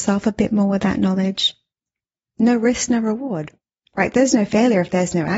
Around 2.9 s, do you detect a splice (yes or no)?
no